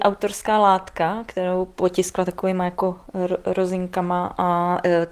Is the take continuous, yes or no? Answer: yes